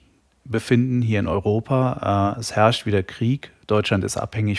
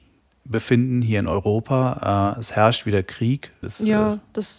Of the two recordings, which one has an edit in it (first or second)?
second